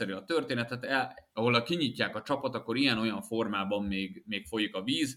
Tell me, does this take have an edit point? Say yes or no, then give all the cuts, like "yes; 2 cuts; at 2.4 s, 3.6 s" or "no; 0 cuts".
yes; 1 cut; at 1.3 s